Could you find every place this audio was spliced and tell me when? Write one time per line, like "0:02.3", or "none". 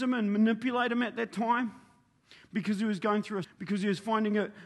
0:03.4